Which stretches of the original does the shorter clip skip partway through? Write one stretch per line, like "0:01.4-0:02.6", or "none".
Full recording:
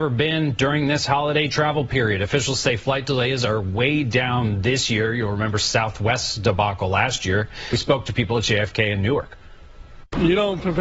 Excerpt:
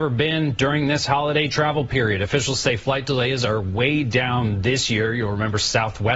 none

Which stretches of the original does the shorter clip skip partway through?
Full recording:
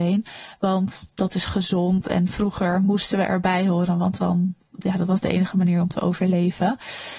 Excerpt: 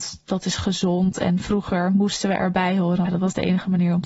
0:03.9-0:04.9

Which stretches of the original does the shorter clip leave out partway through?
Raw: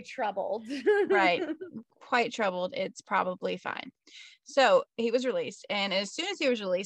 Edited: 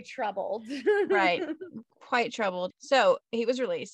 0:02.7-0:04.4

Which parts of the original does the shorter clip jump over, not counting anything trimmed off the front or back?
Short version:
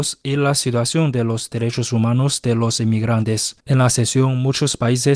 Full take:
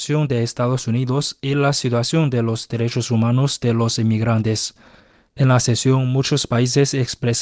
0:04.8-0:05.3

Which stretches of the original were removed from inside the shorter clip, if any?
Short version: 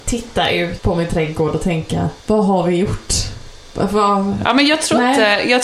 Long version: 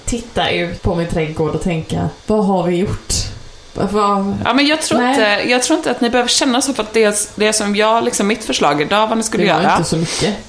none

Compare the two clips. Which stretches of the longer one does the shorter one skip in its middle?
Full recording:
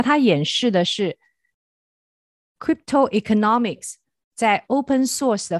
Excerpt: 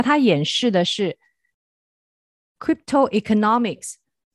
none

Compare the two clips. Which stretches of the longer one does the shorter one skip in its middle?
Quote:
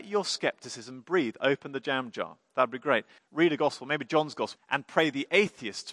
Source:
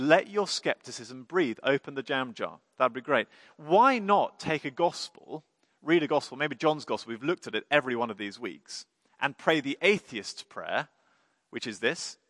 0:03.4-0:05.7
0:07.1-0:09.1

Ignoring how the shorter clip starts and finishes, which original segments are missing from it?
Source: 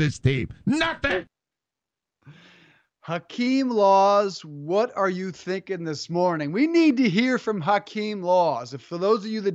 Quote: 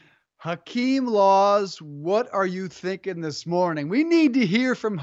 none

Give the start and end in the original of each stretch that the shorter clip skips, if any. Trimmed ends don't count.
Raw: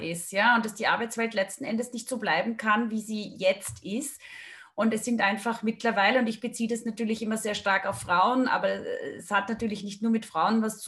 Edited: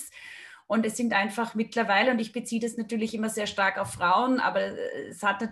none

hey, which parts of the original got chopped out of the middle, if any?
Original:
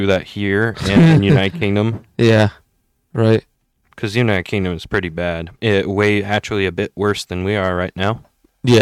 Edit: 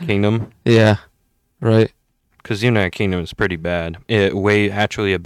none

